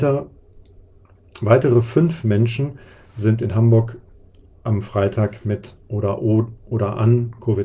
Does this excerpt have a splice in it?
no; 0 cuts

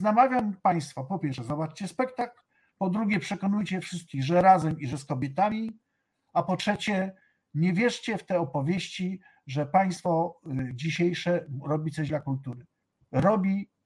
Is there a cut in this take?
no; 0 cuts

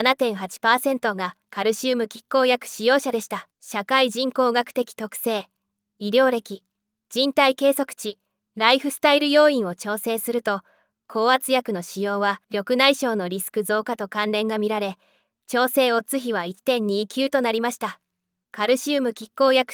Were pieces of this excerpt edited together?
yes; 2 cuts; at 3.5 s, 12.4 s

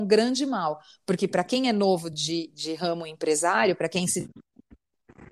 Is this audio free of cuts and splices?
yes; 0 cuts

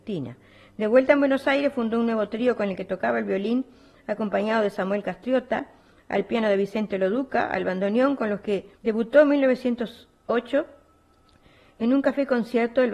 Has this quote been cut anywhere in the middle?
yes; 1 cut; at 8.7 s

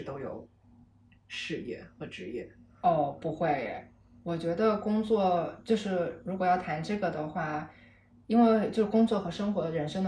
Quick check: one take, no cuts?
yes; 0 cuts

